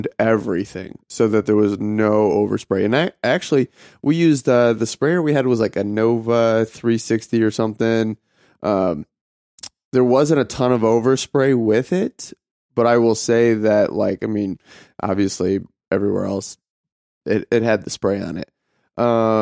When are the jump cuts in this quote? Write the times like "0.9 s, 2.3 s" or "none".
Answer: none